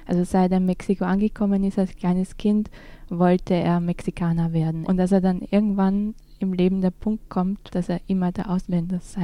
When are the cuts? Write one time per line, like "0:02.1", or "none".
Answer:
0:04.8
0:07.7